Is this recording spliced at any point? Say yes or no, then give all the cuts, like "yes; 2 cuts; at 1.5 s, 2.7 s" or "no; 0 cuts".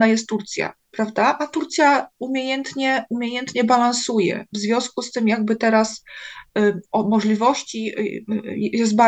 no; 0 cuts